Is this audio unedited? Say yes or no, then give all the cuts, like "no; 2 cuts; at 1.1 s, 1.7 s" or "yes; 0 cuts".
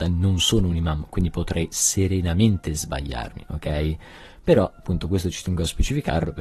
yes; 0 cuts